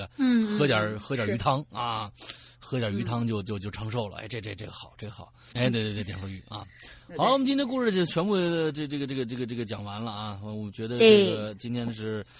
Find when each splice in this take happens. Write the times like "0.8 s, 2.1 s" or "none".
5.5 s